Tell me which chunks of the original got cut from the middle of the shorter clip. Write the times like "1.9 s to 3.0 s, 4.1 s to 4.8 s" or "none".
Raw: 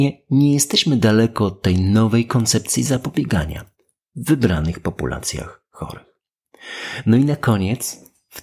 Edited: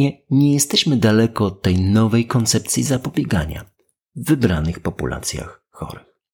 none